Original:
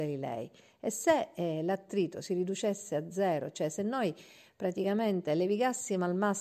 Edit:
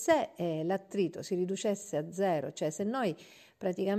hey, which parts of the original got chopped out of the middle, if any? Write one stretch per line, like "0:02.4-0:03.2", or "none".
none